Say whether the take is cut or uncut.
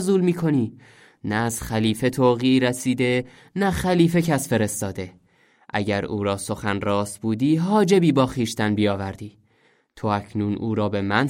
uncut